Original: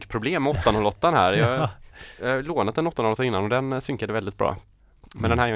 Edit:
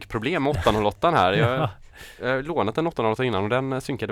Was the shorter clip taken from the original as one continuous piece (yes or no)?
yes